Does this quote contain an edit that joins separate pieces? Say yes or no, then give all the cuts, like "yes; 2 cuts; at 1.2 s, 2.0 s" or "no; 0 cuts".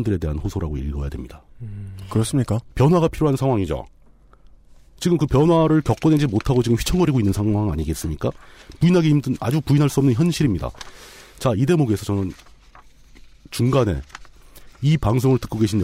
yes; 1 cut; at 2.7 s